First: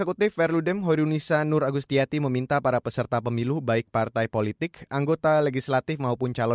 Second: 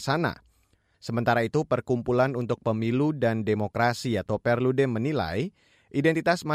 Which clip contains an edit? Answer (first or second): second